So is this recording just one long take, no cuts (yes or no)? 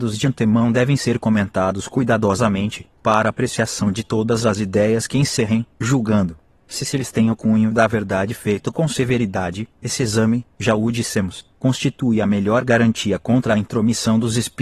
yes